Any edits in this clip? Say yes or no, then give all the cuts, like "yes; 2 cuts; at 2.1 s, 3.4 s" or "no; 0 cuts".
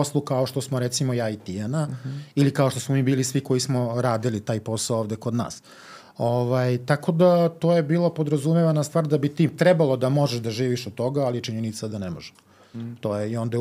no; 0 cuts